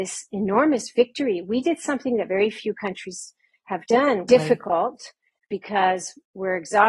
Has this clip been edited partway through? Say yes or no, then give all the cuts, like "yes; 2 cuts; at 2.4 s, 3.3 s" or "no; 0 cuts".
yes; 1 cut; at 4.3 s